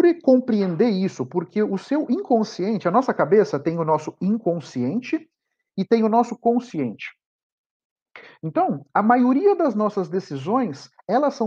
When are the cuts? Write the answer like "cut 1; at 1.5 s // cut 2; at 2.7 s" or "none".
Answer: none